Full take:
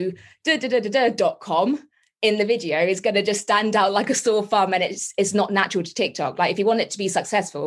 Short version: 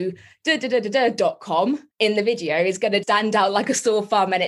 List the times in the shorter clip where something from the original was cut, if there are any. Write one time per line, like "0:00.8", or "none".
0:01.9
0:03.0